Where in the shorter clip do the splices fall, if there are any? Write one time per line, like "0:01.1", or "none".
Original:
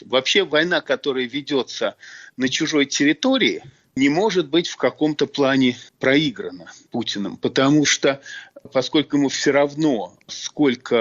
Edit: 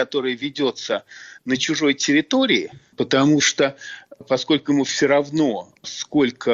0:02.9